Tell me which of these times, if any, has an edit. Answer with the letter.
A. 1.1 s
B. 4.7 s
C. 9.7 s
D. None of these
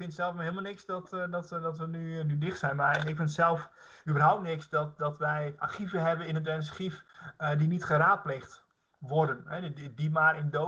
D